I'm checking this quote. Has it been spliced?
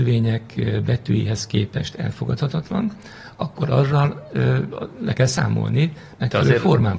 no; 0 cuts

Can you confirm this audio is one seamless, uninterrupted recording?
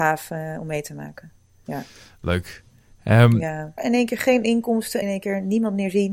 no; 2 cuts; at 3.8 s, 5.0 s

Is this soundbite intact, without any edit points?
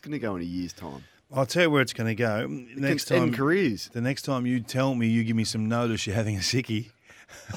yes; 0 cuts

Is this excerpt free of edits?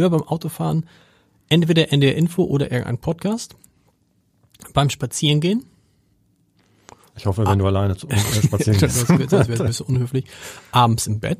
yes; 0 cuts

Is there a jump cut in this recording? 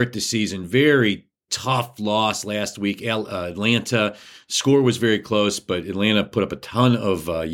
no; 0 cuts

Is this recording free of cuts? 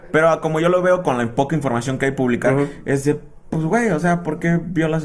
yes; 0 cuts

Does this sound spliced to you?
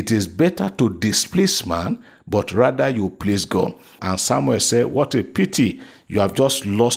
yes; 1 cut; at 4.0 s

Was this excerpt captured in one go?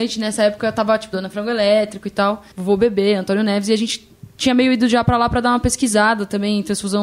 no; 2 cuts; at 1.1 s, 2.5 s

